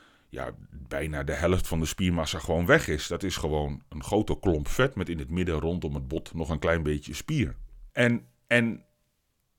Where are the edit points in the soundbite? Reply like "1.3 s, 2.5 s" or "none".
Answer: 7.9 s